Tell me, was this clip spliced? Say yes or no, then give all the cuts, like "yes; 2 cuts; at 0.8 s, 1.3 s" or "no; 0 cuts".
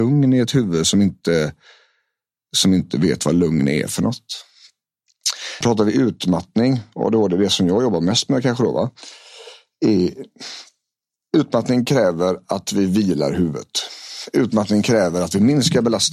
yes; 1 cut; at 5.6 s